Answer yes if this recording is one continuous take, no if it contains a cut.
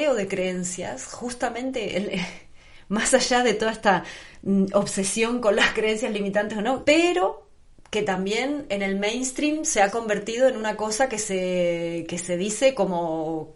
no